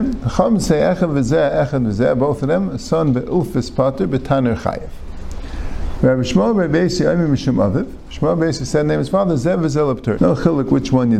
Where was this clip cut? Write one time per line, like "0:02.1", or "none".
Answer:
0:06.0
0:10.2